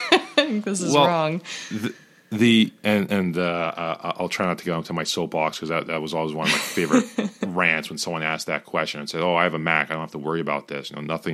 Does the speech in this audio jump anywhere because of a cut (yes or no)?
no